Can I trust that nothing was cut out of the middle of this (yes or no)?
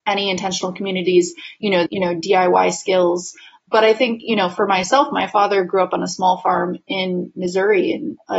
no